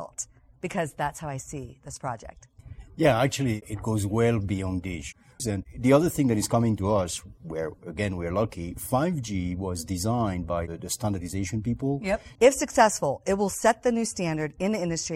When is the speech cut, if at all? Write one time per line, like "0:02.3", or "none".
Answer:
0:05.4
0:12.4